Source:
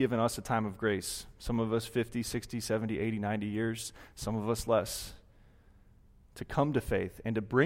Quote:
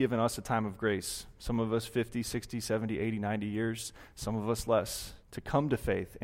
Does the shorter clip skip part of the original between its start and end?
yes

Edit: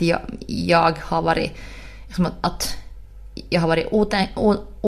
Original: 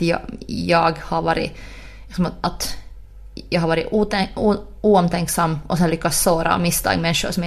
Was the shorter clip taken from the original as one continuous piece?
yes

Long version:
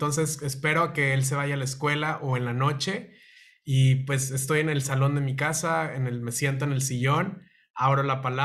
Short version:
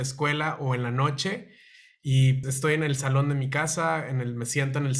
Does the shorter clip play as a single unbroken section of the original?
no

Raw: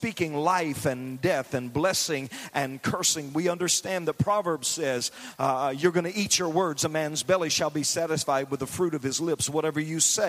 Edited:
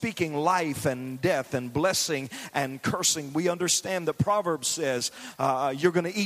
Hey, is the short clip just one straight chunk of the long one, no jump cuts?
yes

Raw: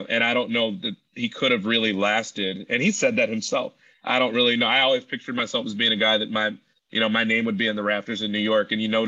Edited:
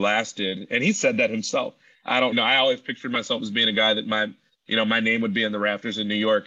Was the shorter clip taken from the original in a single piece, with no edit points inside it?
no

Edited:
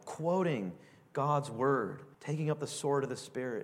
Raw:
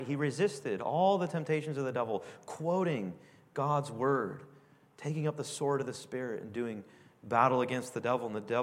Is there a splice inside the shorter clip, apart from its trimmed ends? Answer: yes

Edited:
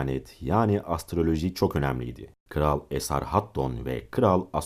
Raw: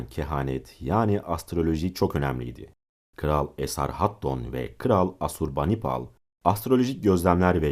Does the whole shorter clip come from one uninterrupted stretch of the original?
no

